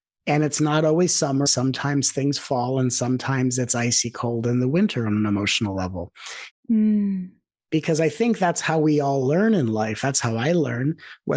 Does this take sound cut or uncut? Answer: cut